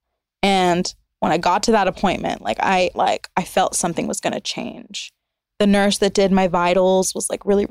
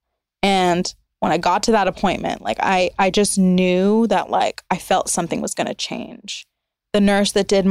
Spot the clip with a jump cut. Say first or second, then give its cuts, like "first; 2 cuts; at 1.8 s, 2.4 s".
first; 1 cut; at 2.9 s